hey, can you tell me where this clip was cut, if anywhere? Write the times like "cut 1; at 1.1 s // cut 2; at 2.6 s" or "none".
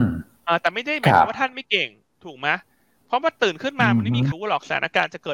cut 1; at 4.3 s